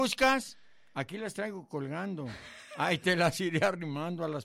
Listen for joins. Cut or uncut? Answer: uncut